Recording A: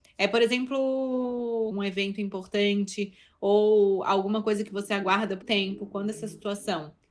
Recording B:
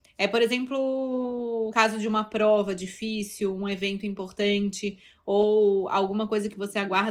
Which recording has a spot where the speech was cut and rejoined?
A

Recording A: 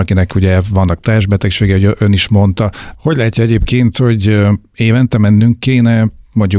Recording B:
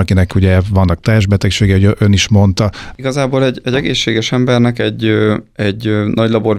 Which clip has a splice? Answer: A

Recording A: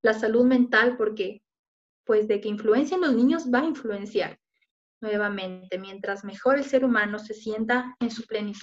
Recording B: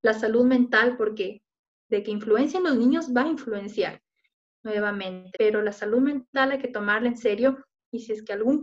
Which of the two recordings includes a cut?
B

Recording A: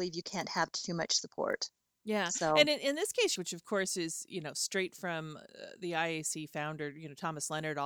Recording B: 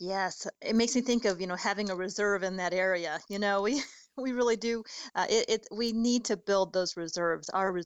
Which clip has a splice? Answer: A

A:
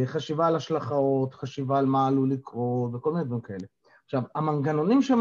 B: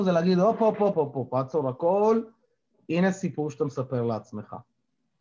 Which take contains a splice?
B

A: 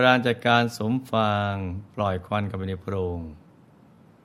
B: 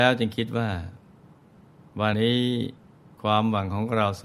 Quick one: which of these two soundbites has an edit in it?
B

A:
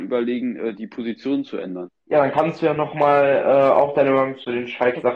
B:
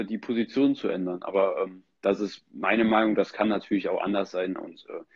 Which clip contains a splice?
A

